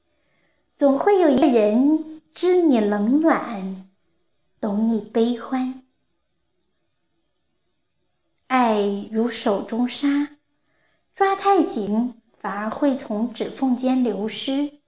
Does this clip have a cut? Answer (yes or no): no